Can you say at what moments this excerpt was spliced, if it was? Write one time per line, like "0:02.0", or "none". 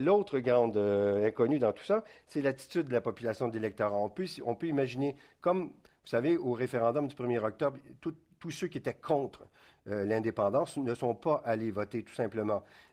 none